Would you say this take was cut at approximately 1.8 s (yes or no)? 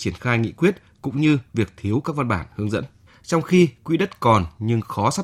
no